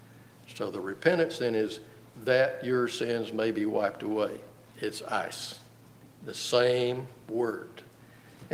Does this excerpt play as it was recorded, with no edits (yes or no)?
no